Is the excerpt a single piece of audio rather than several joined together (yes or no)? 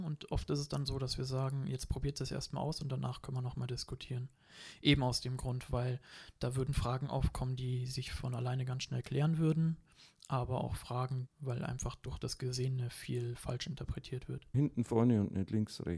no